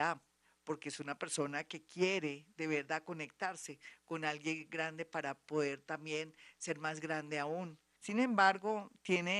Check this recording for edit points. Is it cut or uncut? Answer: cut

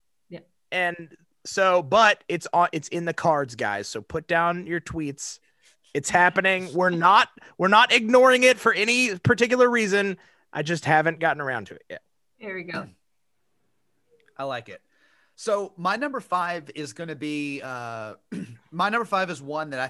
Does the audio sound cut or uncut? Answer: uncut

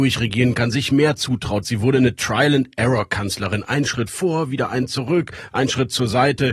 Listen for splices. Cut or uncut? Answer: cut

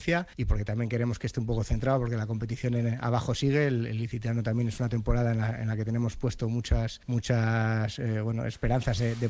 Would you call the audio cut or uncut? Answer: uncut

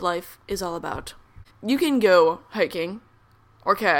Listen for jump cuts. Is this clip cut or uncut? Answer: cut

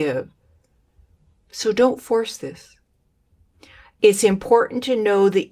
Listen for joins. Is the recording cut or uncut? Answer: uncut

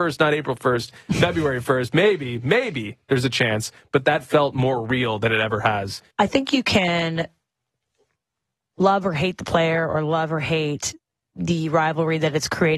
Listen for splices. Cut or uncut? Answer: cut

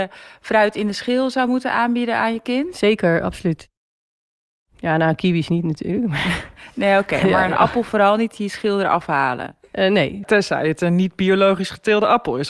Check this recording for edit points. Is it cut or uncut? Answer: cut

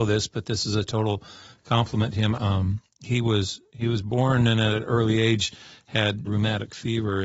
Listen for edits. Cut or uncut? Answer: cut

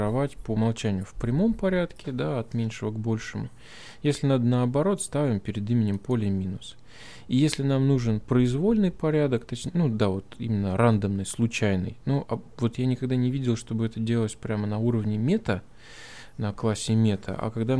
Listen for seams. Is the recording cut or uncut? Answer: uncut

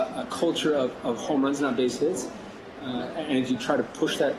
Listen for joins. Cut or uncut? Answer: uncut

